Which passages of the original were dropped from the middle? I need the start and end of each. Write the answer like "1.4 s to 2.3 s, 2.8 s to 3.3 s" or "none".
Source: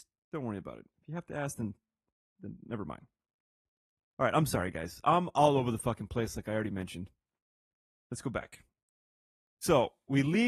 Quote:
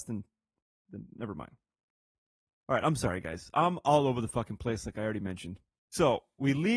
7.3 s to 9.5 s